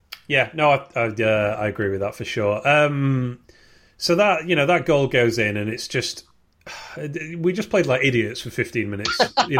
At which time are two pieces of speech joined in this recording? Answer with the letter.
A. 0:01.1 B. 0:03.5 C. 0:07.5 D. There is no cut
D